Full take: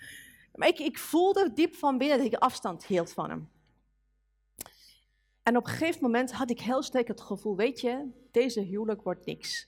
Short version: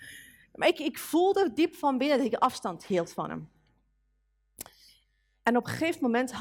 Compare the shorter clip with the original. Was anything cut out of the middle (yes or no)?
no